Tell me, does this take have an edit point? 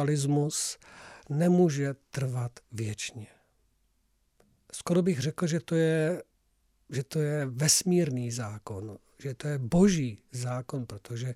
no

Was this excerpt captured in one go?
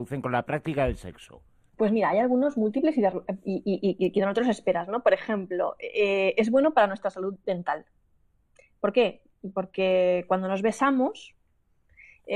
yes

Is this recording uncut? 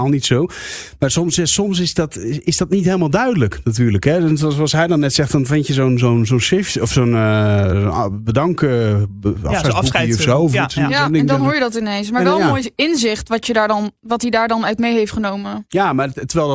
yes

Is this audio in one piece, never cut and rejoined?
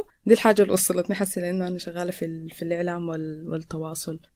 yes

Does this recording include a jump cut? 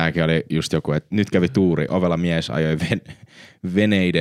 no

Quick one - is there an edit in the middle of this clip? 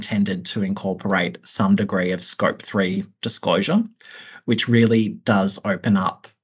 no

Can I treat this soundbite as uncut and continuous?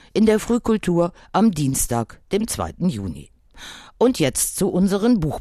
yes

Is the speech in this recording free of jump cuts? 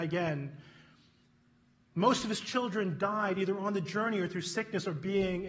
yes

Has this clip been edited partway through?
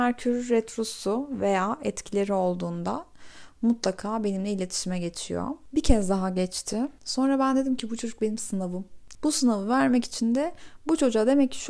yes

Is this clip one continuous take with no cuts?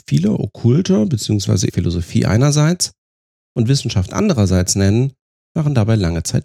no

